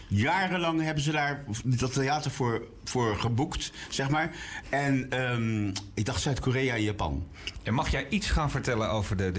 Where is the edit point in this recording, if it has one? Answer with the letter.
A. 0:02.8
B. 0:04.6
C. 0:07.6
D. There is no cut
B